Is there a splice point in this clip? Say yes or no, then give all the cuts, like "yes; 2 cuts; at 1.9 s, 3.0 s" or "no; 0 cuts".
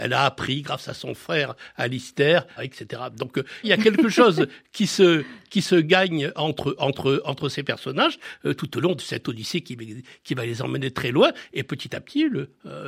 yes; 2 cuts; at 2.6 s, 3.6 s